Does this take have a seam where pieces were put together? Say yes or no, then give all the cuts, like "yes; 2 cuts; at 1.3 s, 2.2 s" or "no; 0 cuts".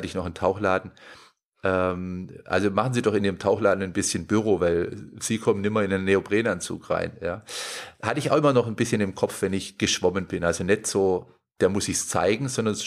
no; 0 cuts